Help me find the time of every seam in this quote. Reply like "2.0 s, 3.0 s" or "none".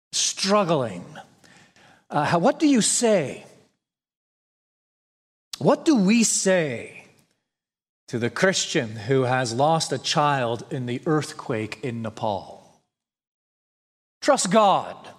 none